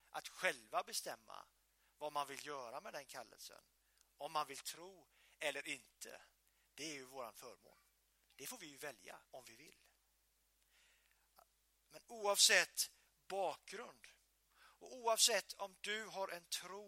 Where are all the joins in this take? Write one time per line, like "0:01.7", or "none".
0:09.2